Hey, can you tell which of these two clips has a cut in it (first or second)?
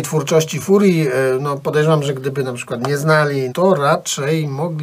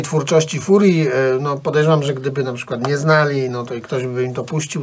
first